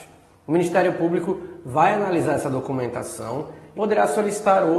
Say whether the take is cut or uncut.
cut